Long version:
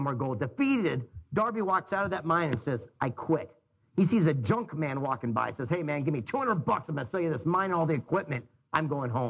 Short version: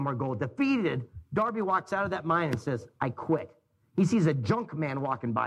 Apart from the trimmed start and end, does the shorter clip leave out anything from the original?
no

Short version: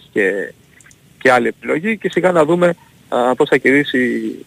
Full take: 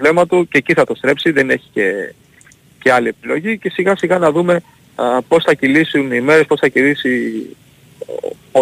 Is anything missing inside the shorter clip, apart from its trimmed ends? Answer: yes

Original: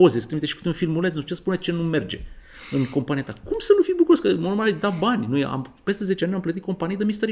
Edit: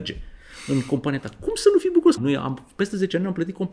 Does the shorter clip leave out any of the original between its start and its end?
yes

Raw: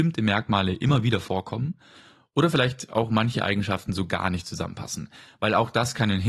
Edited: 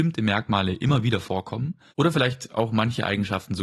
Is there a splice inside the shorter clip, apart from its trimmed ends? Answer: yes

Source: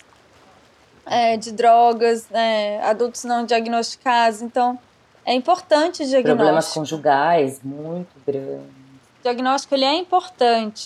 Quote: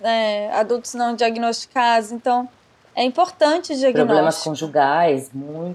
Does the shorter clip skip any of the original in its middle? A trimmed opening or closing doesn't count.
no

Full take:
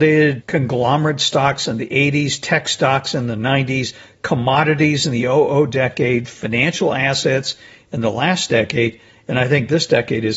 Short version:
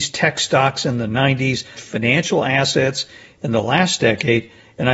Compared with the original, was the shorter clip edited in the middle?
yes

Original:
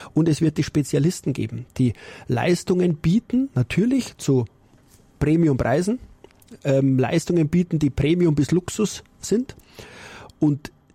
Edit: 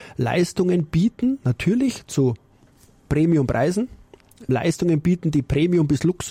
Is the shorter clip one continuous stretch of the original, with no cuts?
no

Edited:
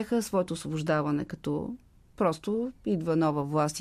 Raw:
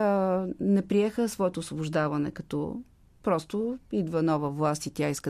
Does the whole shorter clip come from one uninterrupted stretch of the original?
yes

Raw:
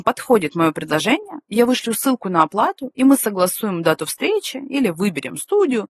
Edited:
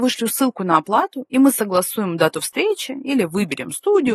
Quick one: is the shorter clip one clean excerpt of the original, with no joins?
yes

